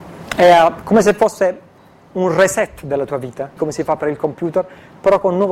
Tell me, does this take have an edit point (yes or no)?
yes